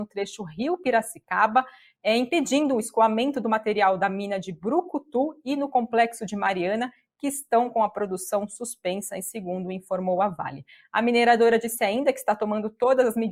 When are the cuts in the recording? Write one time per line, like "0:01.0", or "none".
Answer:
none